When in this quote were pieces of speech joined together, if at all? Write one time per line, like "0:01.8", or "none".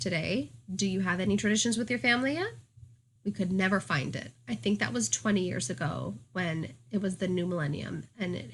0:03.2

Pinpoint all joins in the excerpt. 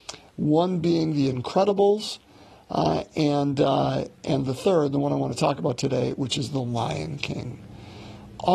none

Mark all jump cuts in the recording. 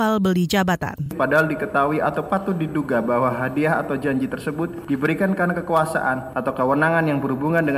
none

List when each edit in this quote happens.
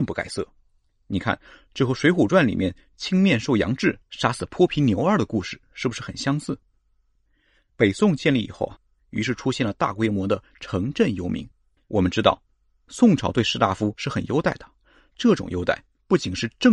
0:09.0
0:11.8

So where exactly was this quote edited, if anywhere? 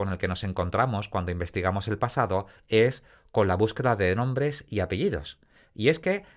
none

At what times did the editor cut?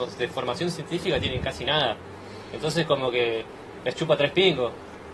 none

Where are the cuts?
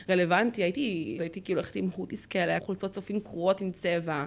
0:01.2
0:02.6

